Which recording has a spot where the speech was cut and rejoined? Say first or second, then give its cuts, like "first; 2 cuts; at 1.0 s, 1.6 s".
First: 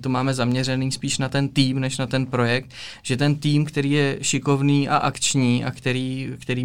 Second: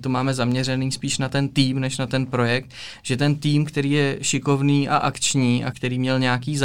second; 1 cut; at 5.7 s